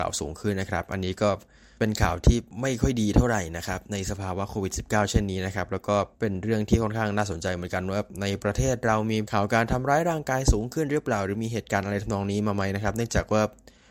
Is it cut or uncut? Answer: cut